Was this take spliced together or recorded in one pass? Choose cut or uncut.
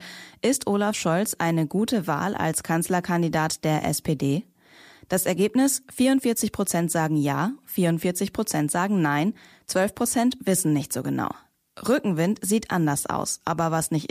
uncut